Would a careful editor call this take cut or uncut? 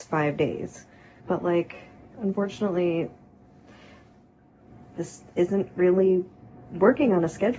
cut